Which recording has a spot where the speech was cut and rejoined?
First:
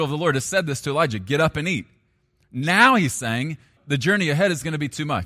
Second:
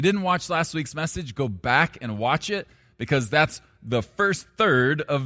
first; 1 cut; at 3.8 s

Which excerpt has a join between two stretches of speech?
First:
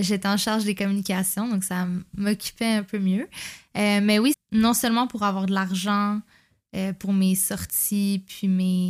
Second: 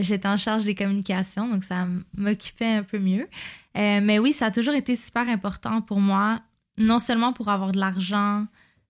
first; 1 cut; at 4.3 s

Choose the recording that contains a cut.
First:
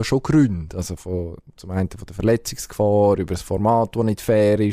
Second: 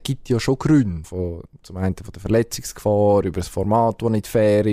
second; 1 cut; at 1.0 s

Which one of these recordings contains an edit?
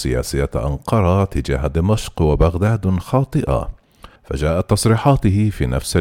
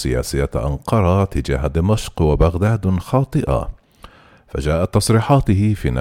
first; 1 cut; at 4.2 s

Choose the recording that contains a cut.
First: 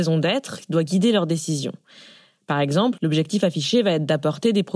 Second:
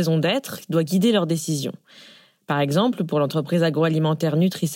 first; 1 cut; at 3.0 s

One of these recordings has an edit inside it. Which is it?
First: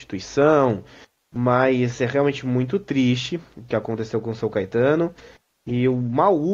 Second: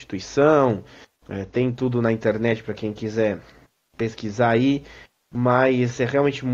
first; 1 cut; at 1.2 s

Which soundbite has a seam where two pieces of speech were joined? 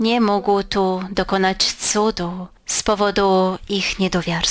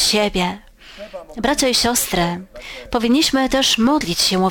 first; 1 cut; at 2.6 s

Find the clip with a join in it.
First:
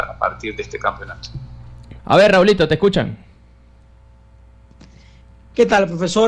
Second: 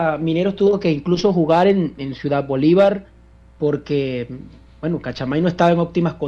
first; 1 cut; at 2.0 s

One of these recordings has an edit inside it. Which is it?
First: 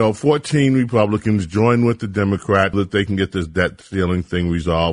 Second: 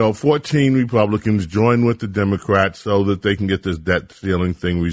first; 1 cut; at 2.7 s

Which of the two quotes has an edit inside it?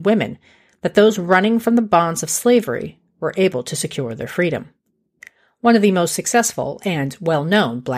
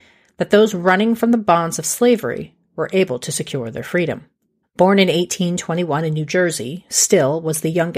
second; 1 cut; at 4.6 s

